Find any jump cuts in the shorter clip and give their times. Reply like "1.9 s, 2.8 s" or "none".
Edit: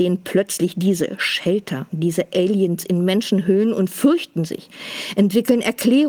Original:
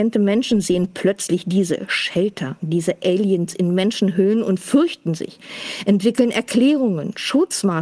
none